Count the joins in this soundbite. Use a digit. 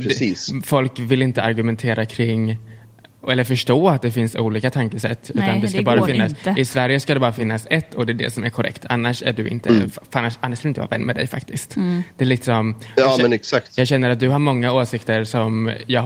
0